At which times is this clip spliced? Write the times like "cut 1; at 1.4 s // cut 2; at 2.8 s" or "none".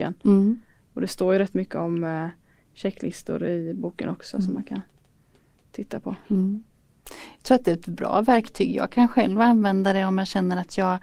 none